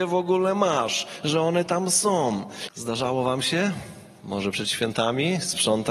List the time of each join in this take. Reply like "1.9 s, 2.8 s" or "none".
2.7 s